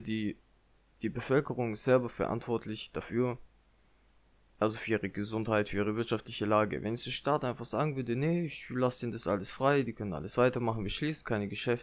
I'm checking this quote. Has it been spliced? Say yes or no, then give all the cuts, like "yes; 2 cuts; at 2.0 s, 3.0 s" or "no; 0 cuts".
no; 0 cuts